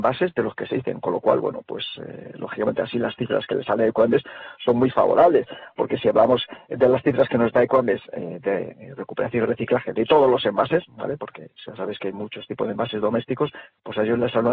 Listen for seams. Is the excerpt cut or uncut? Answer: uncut